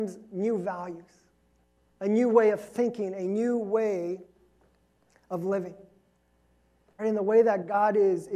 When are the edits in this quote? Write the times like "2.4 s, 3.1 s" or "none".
7.0 s

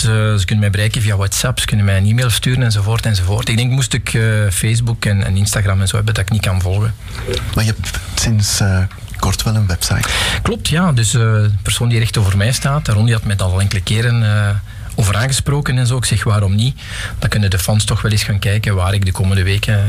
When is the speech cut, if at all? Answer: none

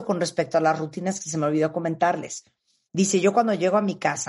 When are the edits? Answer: 2.9 s

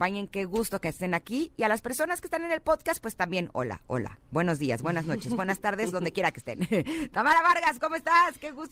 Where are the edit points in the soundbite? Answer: none

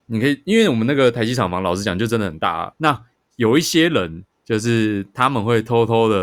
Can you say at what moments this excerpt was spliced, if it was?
2.7 s, 4.3 s

